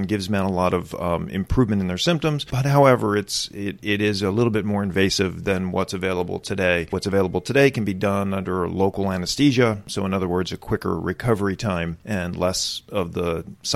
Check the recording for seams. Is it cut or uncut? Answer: uncut